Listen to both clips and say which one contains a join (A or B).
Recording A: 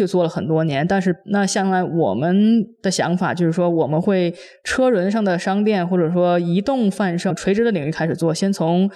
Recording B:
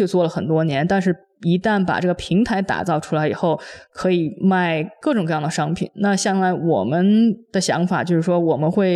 A